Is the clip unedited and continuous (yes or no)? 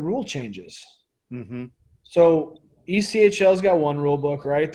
yes